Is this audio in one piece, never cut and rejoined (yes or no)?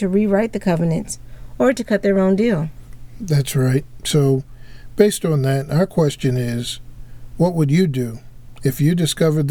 yes